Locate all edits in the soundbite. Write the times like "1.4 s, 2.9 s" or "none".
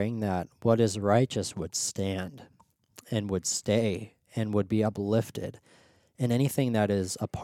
none